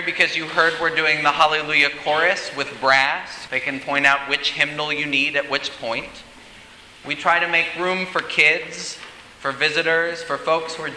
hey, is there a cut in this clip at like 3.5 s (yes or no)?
yes